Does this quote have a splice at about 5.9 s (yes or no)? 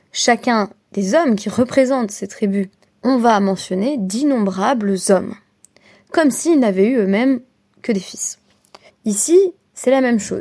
no